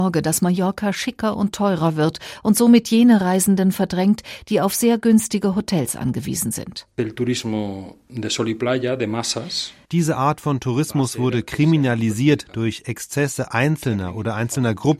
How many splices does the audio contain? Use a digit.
1